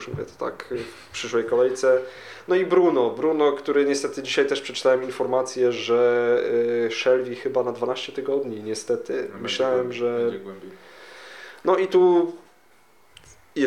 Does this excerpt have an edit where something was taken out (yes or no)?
no